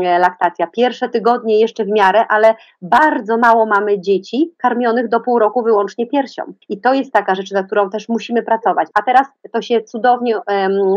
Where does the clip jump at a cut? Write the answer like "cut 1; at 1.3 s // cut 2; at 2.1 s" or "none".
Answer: cut 1; at 6.6 s // cut 2; at 8.9 s